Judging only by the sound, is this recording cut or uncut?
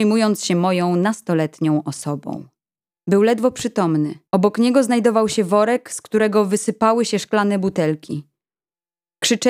cut